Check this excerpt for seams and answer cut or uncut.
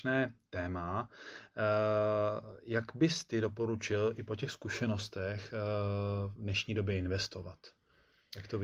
uncut